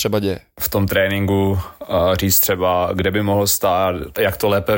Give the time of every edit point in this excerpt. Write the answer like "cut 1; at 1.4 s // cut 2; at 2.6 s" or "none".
none